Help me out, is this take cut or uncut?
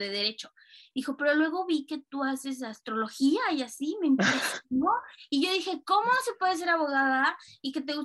uncut